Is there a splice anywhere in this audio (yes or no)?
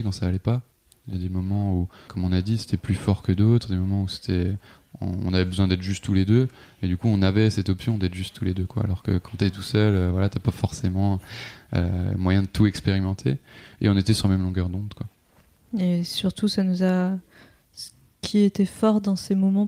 yes